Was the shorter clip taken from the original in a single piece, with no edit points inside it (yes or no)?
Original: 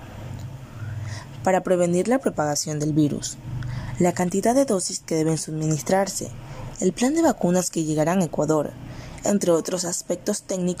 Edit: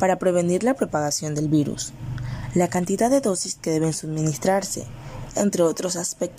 no